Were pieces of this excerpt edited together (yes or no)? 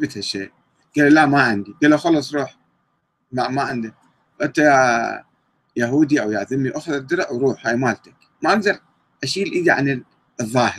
no